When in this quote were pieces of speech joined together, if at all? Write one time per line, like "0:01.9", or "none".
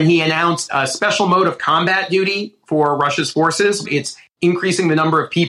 0:03.8